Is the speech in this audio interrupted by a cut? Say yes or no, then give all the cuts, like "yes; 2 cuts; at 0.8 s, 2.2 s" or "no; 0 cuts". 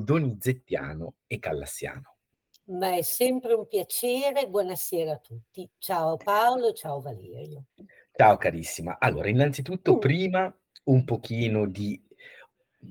no; 0 cuts